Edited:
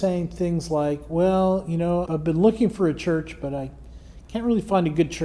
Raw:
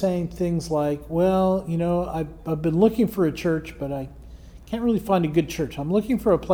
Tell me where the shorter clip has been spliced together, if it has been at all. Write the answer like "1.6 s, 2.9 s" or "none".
2.1 s